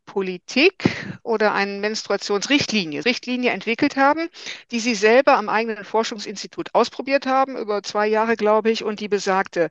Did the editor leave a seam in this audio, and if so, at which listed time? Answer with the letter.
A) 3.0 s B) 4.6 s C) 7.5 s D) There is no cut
A